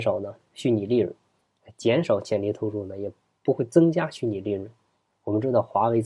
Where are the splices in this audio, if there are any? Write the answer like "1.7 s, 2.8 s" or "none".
5.1 s